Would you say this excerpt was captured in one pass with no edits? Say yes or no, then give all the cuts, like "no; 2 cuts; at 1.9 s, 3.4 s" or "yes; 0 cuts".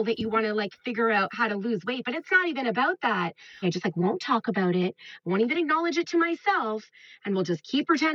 no; 1 cut; at 3.6 s